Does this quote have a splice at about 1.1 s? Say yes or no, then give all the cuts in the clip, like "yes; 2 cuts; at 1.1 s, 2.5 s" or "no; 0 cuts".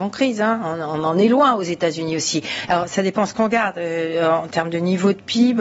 no; 1 cut; at 2.7 s